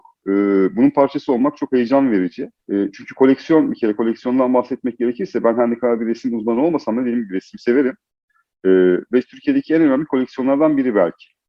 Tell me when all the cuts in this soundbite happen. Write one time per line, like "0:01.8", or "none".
0:02.6